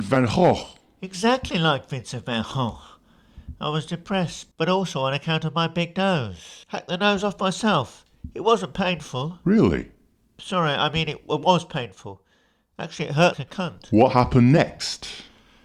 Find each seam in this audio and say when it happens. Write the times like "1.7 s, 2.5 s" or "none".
4.5 s, 6.6 s, 13.3 s